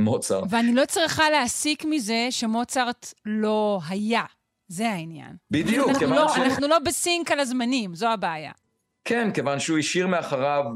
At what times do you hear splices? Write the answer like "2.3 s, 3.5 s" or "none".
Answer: 5.4 s